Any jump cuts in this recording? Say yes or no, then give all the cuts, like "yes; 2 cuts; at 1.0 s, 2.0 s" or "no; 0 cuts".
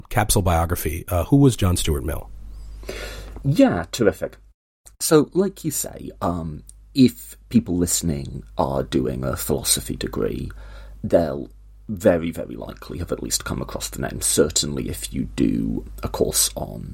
no; 0 cuts